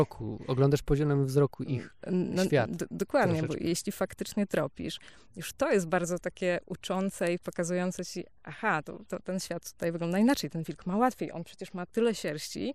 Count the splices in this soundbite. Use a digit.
1